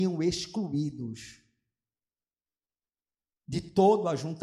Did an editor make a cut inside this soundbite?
no; 0 cuts

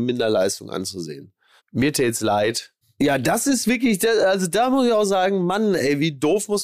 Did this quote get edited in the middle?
yes; 2 cuts; at 1.6 s, 2.8 s

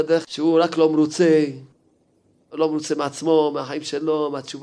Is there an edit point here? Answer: yes; 1 cut; at 2.5 s

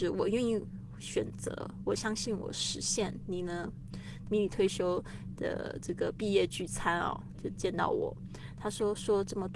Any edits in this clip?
yes; 2 cuts; at 4.2 s, 8.6 s

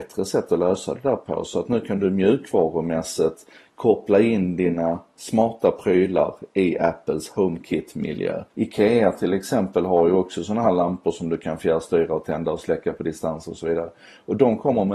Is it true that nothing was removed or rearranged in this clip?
no; 1 cut; at 8.5 s

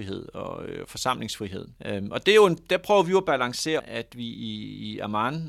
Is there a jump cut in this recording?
yes; 2 cuts; at 1.8 s, 3.8 s

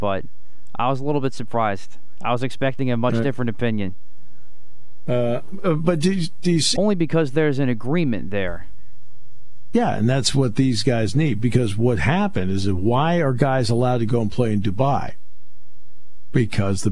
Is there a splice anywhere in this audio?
yes; 1 cut; at 6.8 s

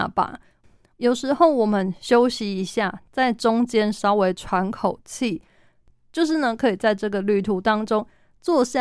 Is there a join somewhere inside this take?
yes; 1 cut; at 0.9 s

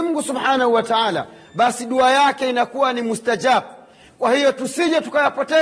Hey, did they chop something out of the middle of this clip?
no; 0 cuts

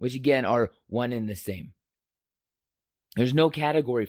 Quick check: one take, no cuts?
yes; 0 cuts

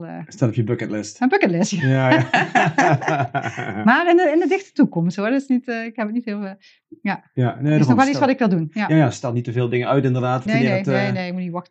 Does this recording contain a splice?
yes; 1 cut; at 10.5 s

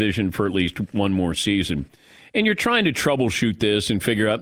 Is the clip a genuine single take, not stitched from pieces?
yes; 0 cuts

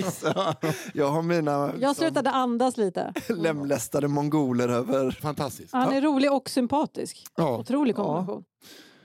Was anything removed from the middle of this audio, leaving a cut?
yes; 1 cut; at 5.2 s

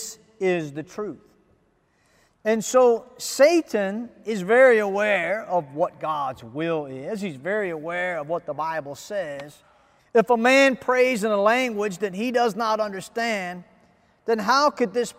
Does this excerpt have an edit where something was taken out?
yes; 1 cut; at 10.0 s

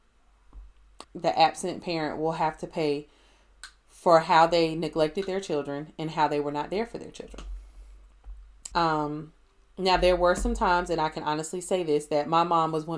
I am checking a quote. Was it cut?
yes; 2 cuts; at 1.0 s, 8.7 s

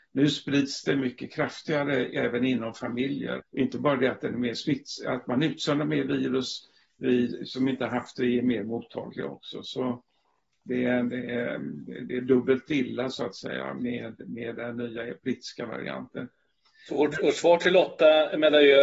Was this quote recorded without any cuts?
no; 1 cut; at 3.4 s

